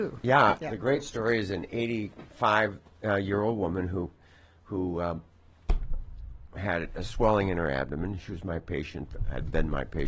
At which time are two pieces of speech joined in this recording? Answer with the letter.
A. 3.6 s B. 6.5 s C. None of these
B